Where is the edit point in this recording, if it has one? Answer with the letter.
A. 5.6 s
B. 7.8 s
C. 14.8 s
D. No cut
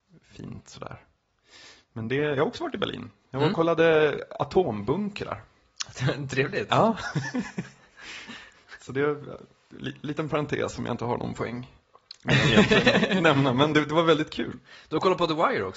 D